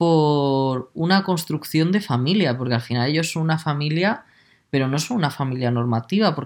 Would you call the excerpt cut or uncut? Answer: uncut